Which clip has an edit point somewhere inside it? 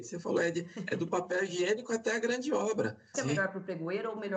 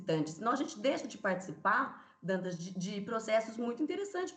first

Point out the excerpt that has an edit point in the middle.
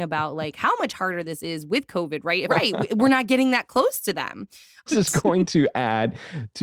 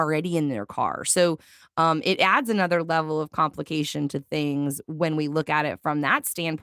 first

